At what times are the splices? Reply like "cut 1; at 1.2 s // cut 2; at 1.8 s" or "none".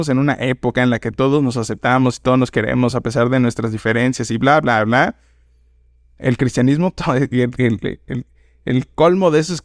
none